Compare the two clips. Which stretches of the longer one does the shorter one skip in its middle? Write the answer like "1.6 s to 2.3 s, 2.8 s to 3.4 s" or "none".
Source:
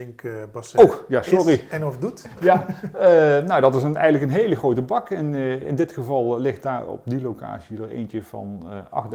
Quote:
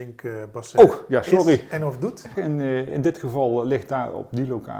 2.4 s to 5.1 s